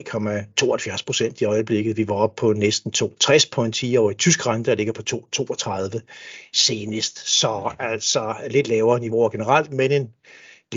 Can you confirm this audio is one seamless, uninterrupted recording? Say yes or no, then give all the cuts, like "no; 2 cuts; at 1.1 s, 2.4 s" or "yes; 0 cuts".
yes; 0 cuts